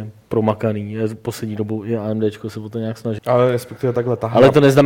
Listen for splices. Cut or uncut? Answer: cut